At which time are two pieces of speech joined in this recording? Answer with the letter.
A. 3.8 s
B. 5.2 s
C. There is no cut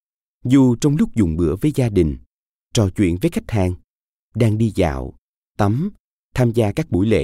C